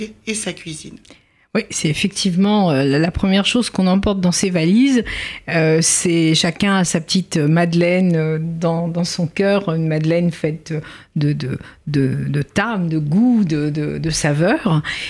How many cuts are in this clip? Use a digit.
0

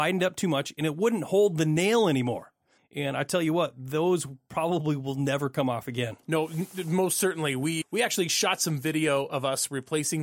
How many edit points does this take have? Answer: 2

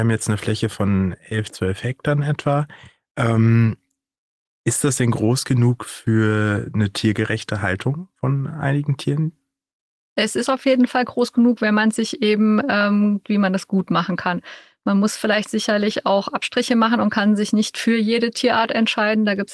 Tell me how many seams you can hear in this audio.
1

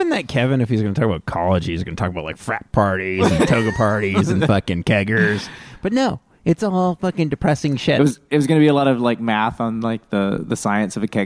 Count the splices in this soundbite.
0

